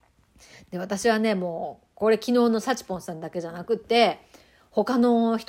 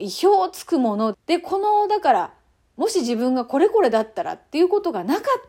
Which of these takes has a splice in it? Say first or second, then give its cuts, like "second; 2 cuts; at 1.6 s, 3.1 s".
second; 1 cut; at 1.1 s